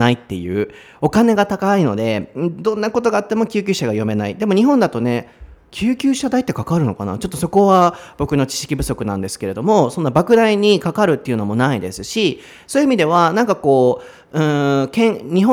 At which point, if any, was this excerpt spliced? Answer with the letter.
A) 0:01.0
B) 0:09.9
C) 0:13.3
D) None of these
D